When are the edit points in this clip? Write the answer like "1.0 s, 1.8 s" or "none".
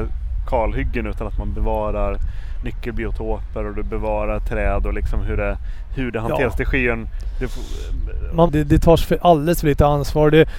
8.5 s